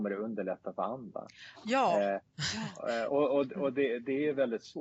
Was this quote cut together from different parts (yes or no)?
yes